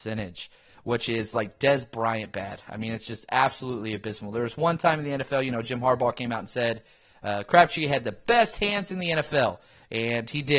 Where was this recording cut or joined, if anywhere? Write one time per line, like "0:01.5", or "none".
none